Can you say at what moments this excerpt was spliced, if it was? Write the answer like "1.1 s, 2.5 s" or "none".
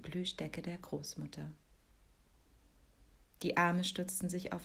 3.2 s